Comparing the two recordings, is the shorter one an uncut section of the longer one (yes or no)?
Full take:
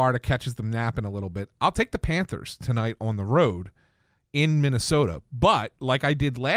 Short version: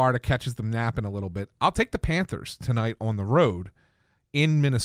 yes